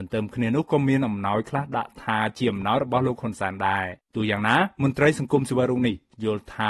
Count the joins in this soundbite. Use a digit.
1